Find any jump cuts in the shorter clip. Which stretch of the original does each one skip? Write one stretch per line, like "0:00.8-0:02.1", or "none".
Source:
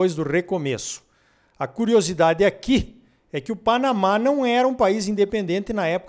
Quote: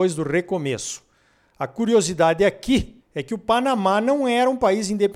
0:03.0-0:03.2